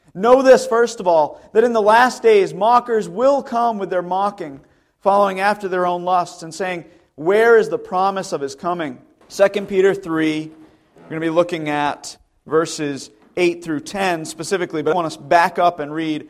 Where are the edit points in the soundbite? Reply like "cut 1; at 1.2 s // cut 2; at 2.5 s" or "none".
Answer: cut 1; at 9.2 s // cut 2; at 14.9 s